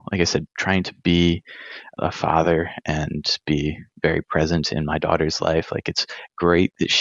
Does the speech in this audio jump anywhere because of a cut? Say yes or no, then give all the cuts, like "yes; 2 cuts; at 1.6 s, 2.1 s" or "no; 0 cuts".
no; 0 cuts